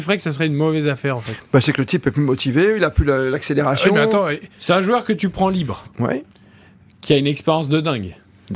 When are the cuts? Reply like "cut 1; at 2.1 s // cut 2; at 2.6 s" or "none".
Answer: none

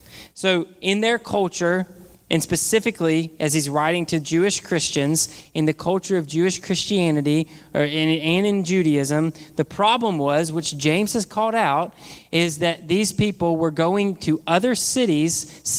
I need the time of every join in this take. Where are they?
none

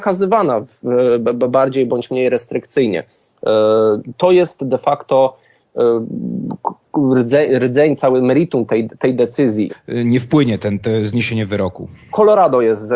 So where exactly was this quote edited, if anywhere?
cut 1; at 9.7 s

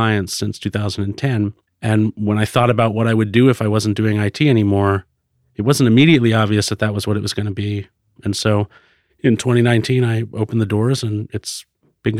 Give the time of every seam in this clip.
cut 1; at 8.2 s

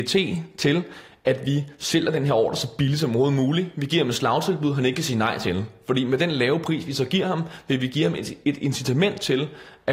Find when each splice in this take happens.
none

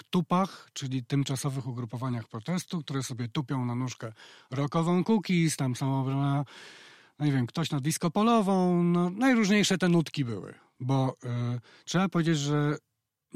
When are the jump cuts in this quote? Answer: cut 1; at 10.8 s

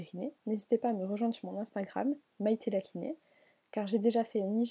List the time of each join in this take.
none

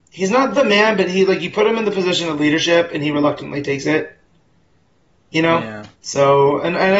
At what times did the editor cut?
cut 1; at 6.0 s

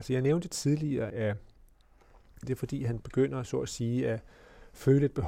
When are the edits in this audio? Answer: cut 1; at 1.1 s // cut 2; at 2.4 s

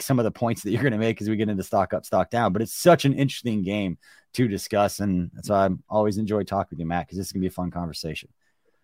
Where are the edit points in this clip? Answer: none

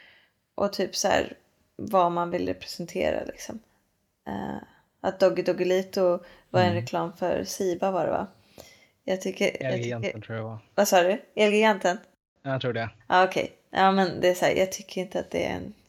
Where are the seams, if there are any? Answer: none

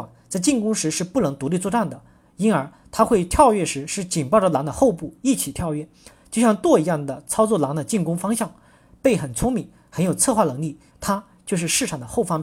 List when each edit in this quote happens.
cut 1; at 10.9 s

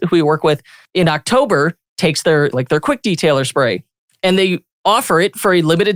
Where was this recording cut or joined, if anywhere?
cut 1; at 2.5 s

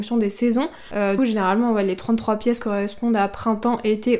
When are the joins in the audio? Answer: cut 1; at 1.2 s

